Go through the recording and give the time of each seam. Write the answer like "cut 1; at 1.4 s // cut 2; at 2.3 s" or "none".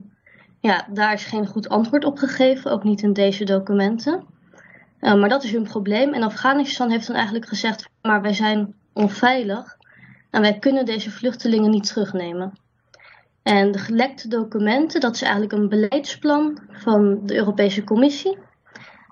none